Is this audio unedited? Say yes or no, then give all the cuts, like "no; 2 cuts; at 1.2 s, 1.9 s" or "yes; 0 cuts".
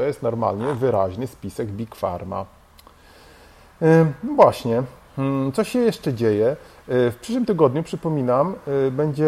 yes; 0 cuts